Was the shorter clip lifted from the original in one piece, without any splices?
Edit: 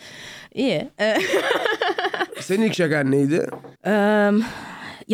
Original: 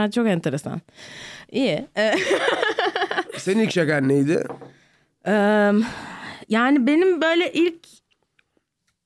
no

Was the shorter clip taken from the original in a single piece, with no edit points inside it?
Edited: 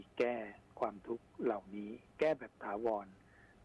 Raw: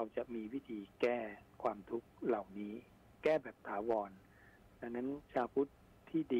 no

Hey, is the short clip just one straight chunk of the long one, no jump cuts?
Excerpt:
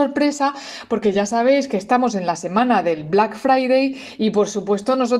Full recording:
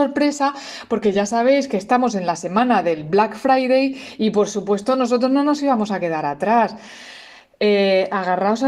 yes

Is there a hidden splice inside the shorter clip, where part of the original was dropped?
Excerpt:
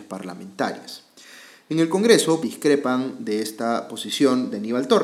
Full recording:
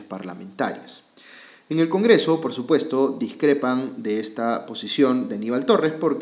yes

